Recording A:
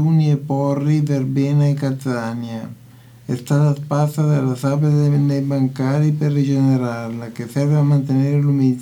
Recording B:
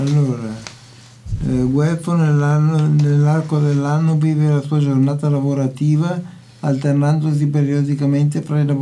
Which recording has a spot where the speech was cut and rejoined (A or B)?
A